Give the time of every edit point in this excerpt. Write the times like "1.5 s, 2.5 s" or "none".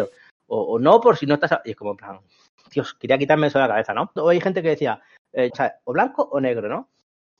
4.2 s, 5.5 s

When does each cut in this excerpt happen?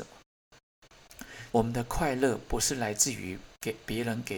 1.5 s

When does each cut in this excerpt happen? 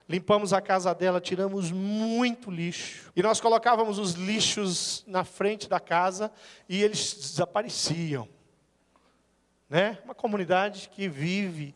3.1 s

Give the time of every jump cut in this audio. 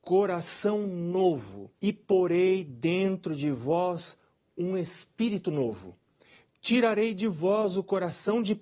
1.7 s

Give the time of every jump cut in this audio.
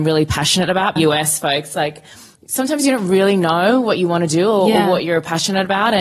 1.0 s

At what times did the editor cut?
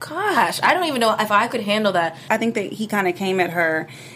2.3 s

